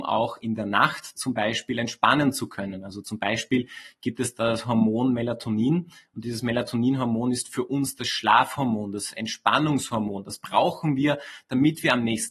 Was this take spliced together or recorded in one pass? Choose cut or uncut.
uncut